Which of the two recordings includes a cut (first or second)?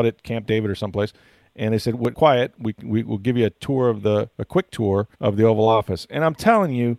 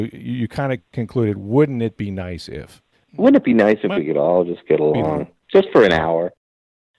first